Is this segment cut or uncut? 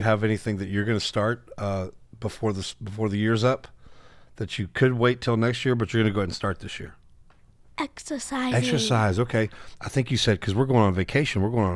uncut